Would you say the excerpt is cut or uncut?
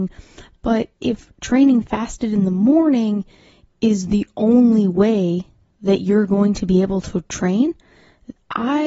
uncut